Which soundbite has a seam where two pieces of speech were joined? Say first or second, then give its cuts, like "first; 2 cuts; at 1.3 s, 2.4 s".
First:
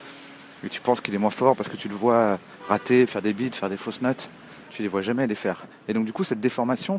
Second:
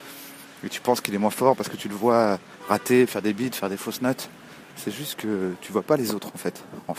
first; 1 cut; at 4.6 s